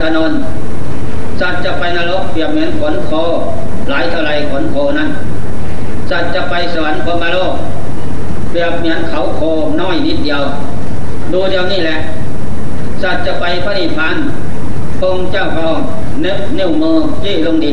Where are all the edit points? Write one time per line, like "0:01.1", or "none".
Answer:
0:14.1